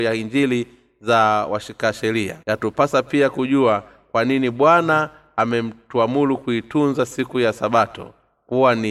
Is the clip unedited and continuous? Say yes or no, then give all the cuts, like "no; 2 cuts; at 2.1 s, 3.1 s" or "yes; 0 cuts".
no; 1 cut; at 2.4 s